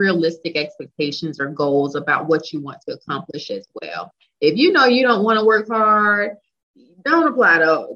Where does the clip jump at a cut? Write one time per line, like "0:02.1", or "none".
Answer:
none